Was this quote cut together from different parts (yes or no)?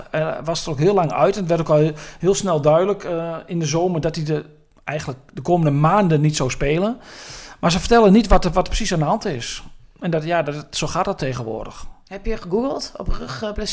no